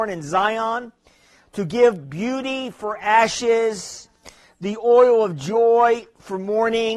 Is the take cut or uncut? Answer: uncut